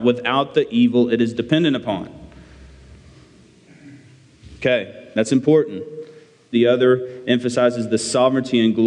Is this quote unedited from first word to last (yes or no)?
no